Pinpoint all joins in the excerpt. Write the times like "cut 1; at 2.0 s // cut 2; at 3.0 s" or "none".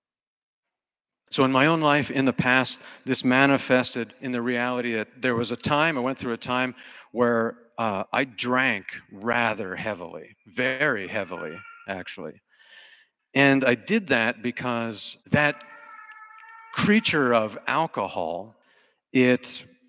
cut 1; at 13.2 s // cut 2; at 15.2 s